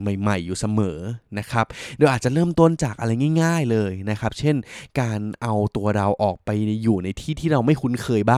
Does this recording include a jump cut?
no; 0 cuts

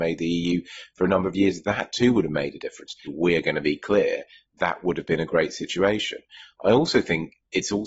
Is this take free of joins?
no; 1 cut; at 3.0 s

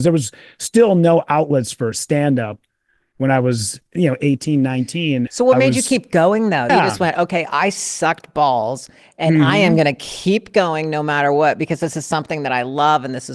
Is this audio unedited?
no; 2 cuts; at 5.3 s, 6.7 s

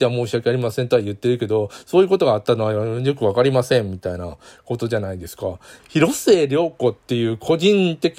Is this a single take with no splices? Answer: yes; 0 cuts

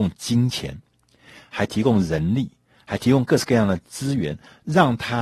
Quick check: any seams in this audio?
no; 0 cuts

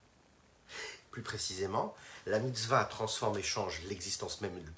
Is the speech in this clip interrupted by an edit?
yes; 1 cut; at 1.0 s

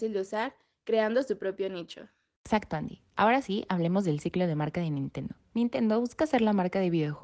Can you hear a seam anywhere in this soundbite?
yes; 1 cut; at 5.5 s

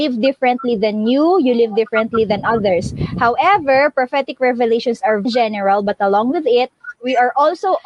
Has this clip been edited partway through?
yes; 2 cuts; at 5.3 s, 7.0 s

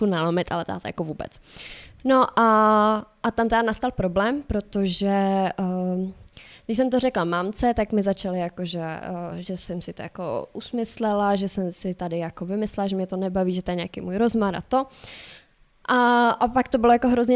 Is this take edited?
no; 0 cuts

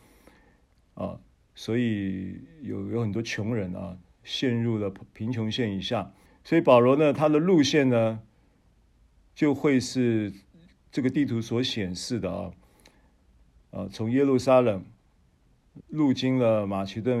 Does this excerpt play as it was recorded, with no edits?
no; 2 cuts; at 6.3 s, 15.8 s

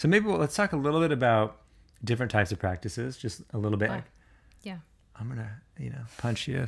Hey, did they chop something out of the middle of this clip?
yes; 1 cut; at 3.9 s

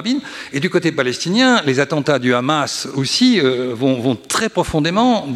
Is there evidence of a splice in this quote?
no; 0 cuts

